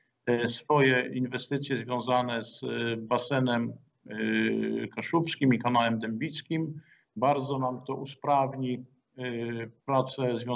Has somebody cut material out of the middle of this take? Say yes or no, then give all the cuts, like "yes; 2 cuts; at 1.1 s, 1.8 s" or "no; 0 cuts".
yes; 1 cut; at 7.0 s